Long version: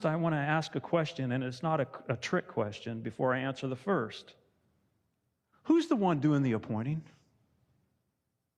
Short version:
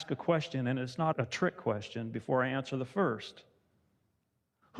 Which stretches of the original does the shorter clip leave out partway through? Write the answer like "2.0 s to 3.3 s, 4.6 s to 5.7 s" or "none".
1.8 s to 2.0 s

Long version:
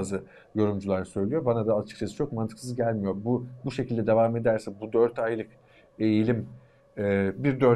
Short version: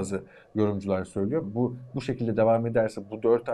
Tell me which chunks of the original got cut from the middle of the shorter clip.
1.4 s to 3.1 s

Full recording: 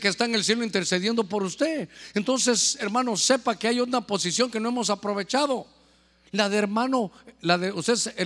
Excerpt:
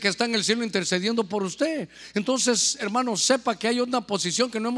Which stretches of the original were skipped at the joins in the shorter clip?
none

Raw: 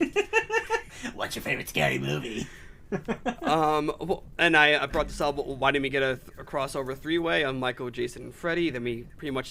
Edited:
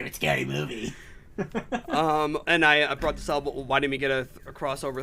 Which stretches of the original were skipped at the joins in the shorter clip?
4.0 s to 4.4 s

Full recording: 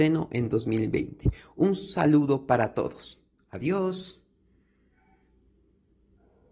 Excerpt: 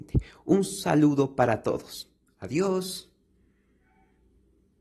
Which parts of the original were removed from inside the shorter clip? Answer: none

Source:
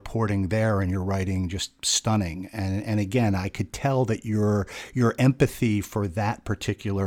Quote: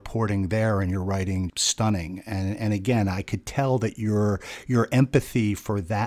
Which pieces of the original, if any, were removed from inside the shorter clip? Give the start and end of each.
1.5 s to 1.8 s

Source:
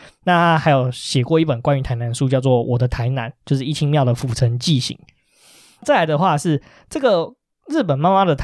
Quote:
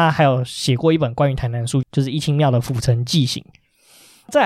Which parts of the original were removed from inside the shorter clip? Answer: 2.3 s to 3.4 s

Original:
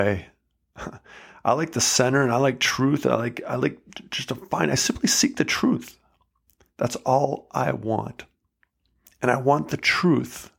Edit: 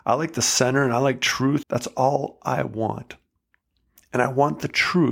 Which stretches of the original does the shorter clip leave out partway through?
3.0 s to 6.7 s

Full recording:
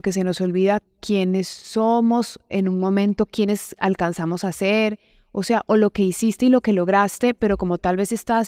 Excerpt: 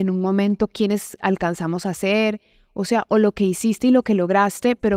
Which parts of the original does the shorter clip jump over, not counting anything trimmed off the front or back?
none

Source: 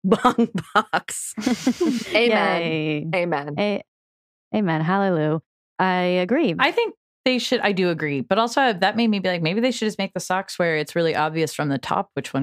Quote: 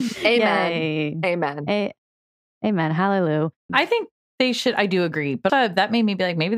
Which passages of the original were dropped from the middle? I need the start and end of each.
5.6 s to 6.6 s, 8.4 s to 8.5 s

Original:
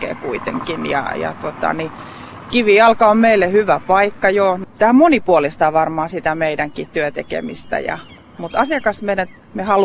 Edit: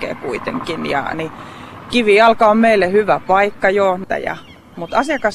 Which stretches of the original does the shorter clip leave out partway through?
1.1 s to 1.7 s, 4.7 s to 7.7 s

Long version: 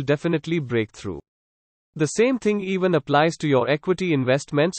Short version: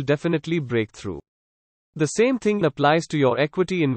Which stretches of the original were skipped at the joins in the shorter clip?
2.6 s to 2.9 s

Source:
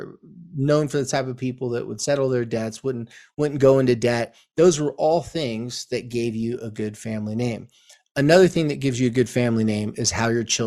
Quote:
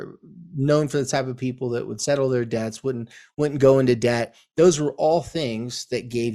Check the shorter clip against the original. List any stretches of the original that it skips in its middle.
none

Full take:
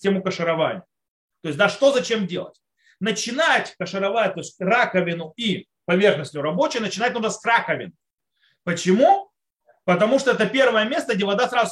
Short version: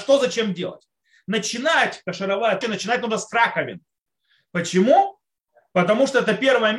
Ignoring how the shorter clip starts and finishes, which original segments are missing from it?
4.3 s to 6.7 s

